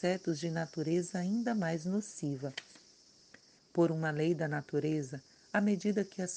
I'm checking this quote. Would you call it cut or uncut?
cut